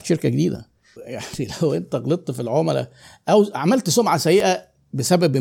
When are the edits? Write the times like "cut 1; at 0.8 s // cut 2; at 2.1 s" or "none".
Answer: cut 1; at 1.0 s